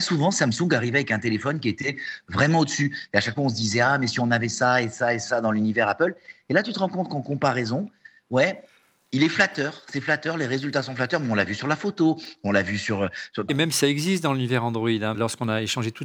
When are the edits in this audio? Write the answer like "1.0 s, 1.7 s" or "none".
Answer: 13.5 s, 15.1 s